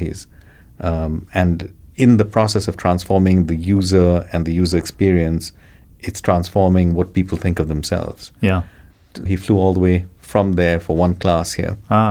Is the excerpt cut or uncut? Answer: cut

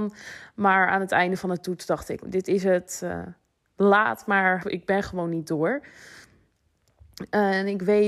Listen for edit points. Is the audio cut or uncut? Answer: cut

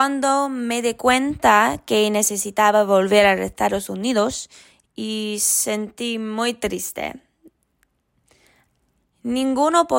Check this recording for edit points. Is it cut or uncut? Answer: cut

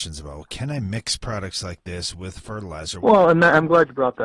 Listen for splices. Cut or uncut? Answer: cut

